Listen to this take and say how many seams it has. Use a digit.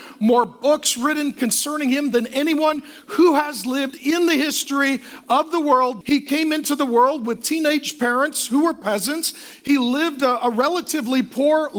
1